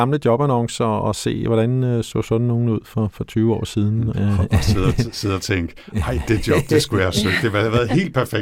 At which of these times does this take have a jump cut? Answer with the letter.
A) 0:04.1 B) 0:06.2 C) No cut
A